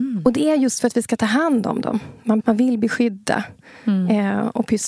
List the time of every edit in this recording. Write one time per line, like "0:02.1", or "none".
0:02.4